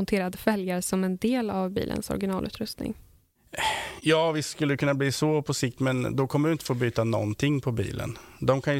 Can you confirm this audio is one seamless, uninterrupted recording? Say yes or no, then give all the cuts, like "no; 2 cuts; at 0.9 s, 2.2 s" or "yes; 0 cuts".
yes; 0 cuts